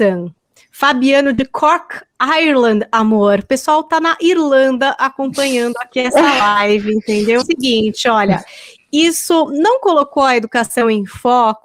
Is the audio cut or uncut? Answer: cut